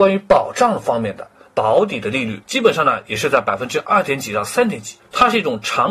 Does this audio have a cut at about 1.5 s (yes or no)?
yes